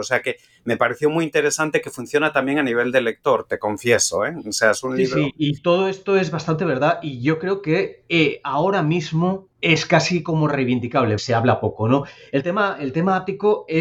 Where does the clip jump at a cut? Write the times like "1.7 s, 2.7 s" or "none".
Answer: 9.5 s, 11.2 s